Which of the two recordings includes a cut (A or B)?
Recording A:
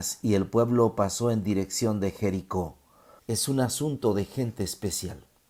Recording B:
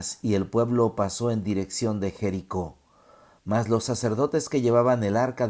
A